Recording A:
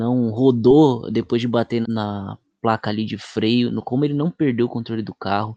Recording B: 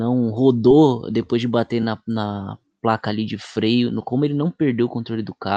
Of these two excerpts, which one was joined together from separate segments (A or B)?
A